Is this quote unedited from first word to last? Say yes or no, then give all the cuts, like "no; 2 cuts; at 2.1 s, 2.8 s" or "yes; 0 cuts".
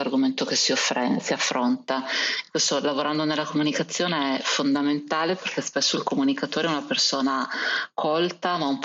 yes; 0 cuts